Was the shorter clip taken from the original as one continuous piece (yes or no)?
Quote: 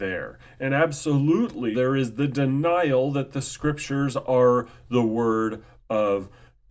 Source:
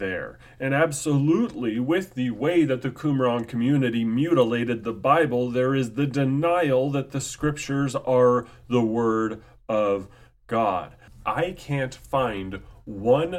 no